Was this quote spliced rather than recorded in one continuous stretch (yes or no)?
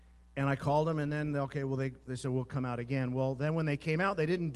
no